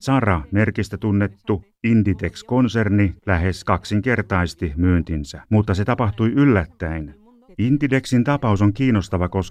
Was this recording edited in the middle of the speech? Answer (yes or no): yes